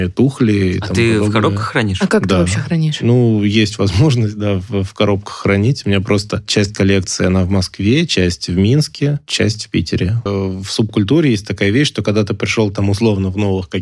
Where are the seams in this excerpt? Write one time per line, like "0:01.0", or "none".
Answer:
0:10.3

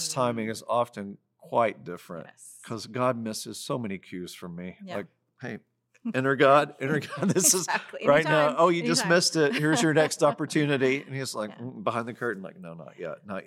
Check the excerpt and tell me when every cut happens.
none

